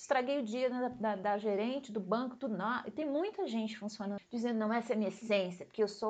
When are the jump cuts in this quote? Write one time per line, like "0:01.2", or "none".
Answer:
0:04.2